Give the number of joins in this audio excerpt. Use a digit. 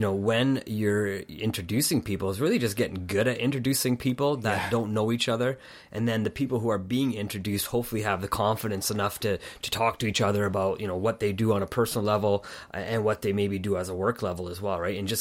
0